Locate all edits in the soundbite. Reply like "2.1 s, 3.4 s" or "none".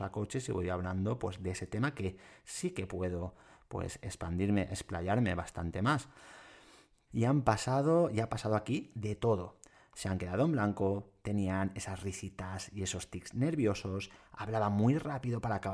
7.1 s